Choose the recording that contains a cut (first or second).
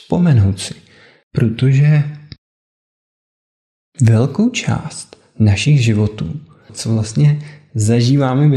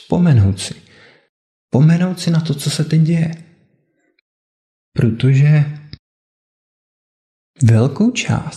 first